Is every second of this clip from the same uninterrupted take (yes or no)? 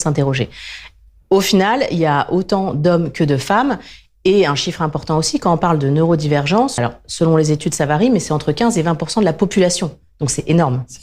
no